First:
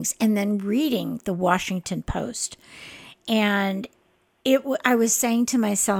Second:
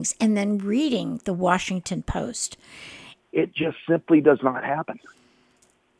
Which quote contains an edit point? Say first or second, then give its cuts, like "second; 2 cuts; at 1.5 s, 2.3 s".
second; 1 cut; at 3.2 s